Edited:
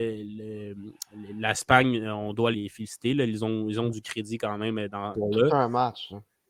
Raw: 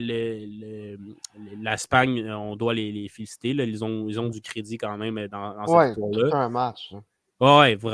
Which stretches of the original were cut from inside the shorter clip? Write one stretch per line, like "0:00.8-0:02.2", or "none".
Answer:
0:02.8-0:02.9
0:05.5-0:05.9